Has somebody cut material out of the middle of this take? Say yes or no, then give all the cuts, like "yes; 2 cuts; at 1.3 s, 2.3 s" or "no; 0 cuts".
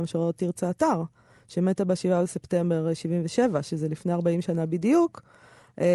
no; 0 cuts